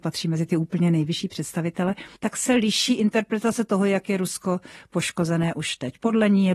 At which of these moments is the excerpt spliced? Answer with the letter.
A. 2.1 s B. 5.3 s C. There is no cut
A